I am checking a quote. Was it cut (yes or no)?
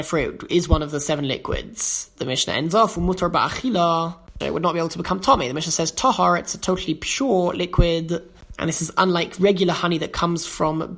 yes